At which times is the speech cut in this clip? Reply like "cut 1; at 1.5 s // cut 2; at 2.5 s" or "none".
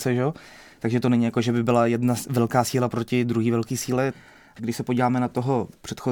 cut 1; at 4.6 s